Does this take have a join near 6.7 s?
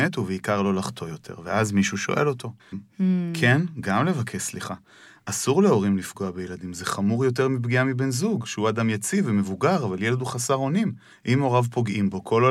no; 1 cut; at 2.7 s

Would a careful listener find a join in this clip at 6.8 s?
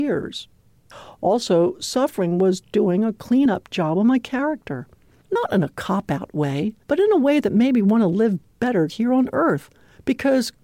yes; 2 cuts; at 5.2 s, 6.8 s

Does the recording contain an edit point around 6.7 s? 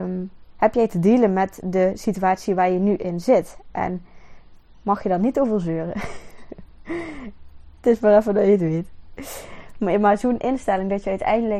yes; 1 cut; at 6.7 s

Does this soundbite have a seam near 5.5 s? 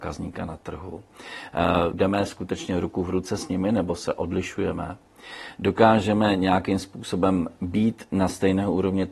no; 1 cut; at 1.9 s

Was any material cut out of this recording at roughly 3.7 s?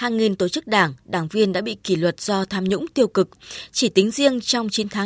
no; 0 cuts

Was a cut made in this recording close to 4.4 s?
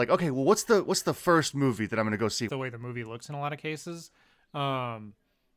no; 1 cut; at 2.5 s

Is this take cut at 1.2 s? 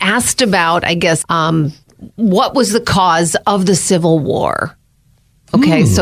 yes; 1 cut; at 1.2 s

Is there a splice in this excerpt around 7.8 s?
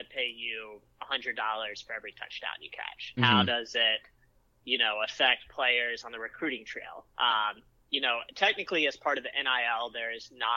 no; 1 cut; at 3.2 s

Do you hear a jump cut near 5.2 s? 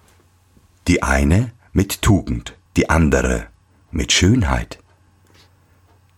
no; 1 cut; at 2.7 s

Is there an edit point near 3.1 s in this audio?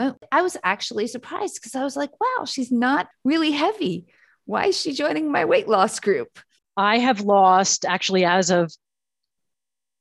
yes; 2 cuts; at 3.1 s, 6.6 s

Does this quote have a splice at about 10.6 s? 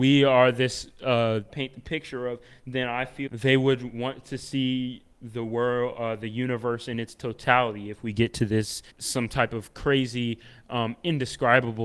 no; 3 cuts; at 1.5 s, 3.3 s, 8.9 s

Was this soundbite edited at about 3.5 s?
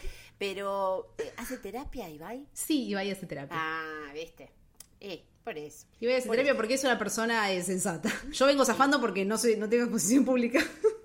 no; 2 cuts; at 5.9 s, 8.3 s

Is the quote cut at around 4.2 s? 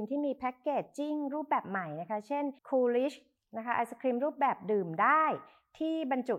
no; 1 cut; at 2.6 s

